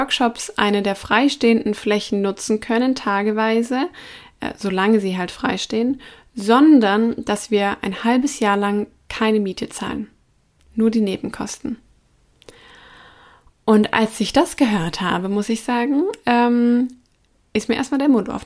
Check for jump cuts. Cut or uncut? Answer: uncut